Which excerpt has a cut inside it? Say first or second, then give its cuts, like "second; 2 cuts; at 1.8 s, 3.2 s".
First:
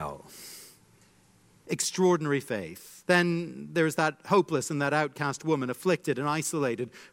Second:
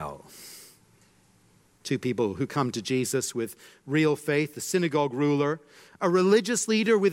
first; 2 cuts; at 1.6 s, 3.0 s